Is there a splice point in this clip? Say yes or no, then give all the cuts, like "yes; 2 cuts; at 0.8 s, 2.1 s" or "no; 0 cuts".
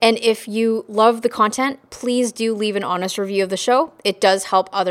no; 0 cuts